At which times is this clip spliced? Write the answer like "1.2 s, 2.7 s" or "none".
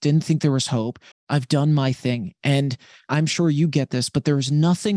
1.1 s